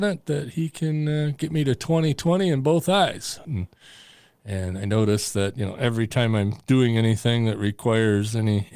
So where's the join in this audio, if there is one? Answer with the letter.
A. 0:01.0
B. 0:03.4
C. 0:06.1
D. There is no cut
B